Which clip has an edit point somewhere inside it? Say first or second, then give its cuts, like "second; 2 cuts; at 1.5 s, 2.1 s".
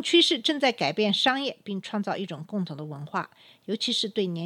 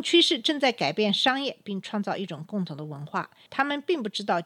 second; 1 cut; at 3.5 s